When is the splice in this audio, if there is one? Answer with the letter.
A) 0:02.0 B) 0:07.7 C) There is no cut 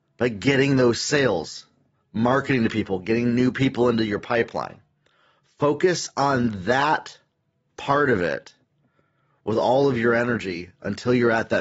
C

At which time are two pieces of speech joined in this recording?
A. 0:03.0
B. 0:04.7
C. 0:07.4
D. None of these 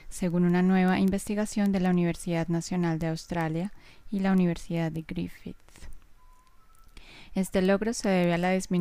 D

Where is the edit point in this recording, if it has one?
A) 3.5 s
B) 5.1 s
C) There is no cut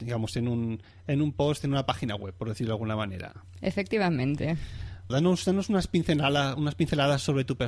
B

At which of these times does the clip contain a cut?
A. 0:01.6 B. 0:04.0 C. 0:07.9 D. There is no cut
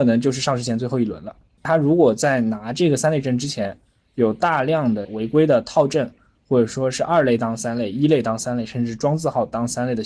A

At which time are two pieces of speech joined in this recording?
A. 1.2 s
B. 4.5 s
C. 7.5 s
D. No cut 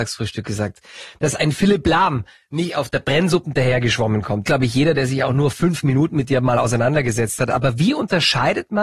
B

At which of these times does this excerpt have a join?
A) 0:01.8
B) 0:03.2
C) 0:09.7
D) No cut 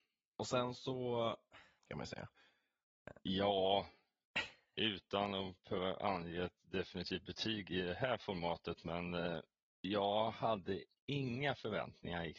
A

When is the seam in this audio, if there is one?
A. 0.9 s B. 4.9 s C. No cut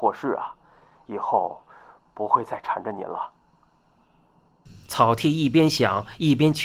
B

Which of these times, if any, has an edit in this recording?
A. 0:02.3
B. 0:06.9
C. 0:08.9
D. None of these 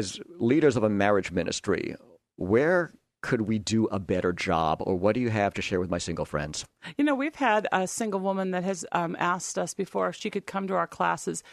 D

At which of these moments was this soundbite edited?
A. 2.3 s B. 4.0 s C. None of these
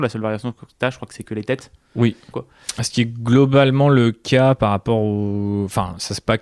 A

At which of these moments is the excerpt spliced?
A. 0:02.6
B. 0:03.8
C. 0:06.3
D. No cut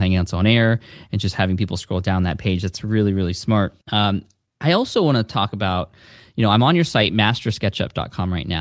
B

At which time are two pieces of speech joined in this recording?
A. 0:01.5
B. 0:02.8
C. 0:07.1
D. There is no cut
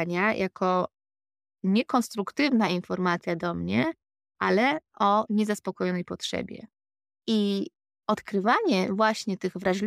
C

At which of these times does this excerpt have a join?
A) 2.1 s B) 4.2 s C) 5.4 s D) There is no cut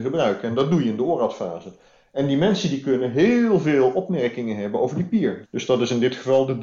C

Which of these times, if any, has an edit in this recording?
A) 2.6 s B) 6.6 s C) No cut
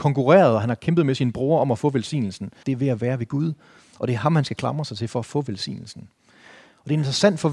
A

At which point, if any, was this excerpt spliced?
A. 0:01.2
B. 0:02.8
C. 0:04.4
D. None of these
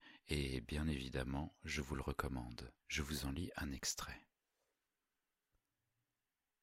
B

